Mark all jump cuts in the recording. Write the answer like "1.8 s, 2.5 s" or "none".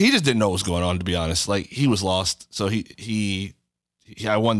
none